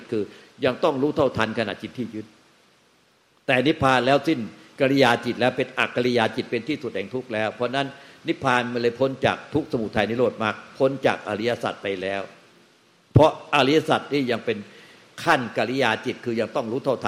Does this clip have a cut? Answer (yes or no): no